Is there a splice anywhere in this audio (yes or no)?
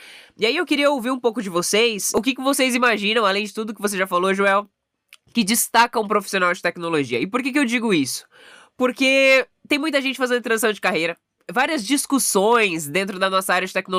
no